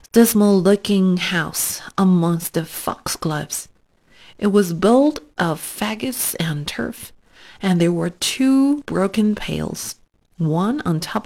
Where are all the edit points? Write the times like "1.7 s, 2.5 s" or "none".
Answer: none